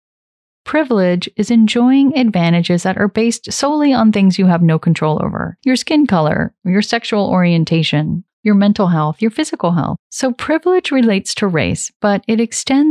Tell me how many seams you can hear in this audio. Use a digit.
3